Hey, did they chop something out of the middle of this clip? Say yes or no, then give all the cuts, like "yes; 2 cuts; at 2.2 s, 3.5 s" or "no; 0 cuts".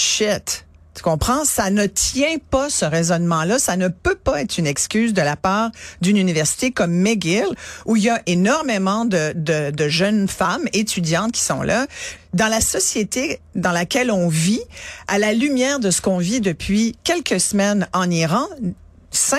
yes; 1 cut; at 12.2 s